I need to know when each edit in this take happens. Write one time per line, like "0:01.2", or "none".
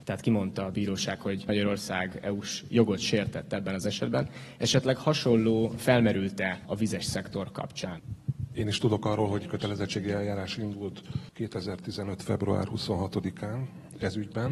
0:08.6